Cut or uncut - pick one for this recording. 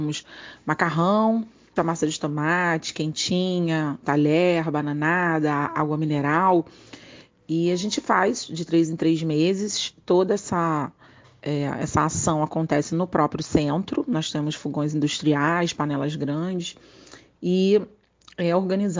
cut